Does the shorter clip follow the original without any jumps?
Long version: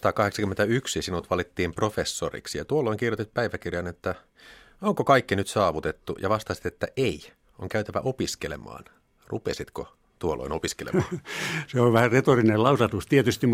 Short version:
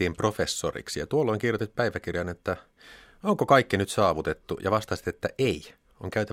yes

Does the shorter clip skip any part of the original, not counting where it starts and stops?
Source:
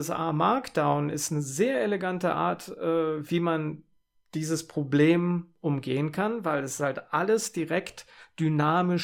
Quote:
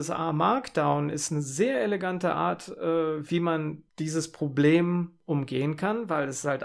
yes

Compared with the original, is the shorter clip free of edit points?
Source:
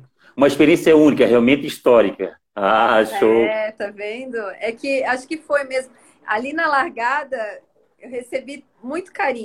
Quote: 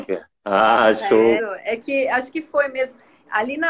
no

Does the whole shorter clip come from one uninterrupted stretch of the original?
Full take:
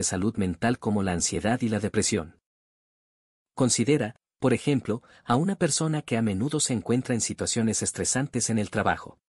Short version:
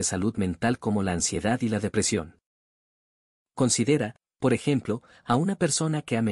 yes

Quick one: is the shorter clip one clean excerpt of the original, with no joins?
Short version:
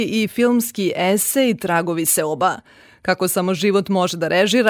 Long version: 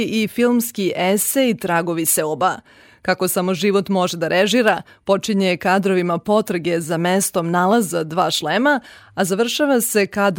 yes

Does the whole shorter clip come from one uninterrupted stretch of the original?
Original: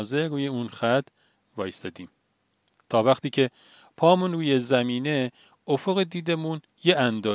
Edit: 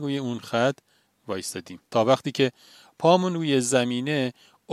no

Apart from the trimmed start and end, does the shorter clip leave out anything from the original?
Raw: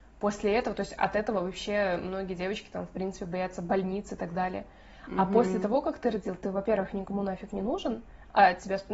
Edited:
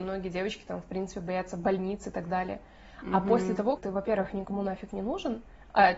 yes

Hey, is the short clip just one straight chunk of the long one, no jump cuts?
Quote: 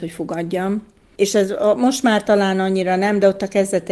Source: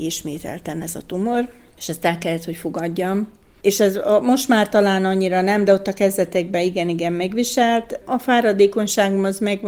yes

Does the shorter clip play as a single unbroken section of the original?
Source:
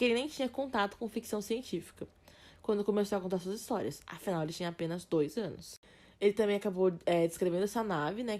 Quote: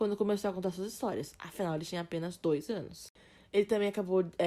yes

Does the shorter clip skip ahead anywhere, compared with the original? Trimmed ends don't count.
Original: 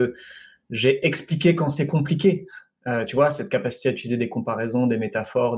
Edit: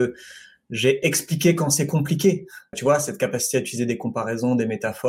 yes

